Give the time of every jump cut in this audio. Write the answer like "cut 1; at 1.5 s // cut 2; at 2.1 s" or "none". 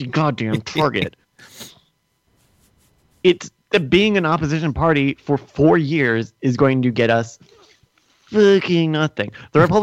none